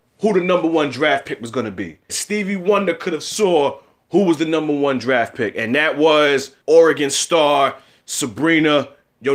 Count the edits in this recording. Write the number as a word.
two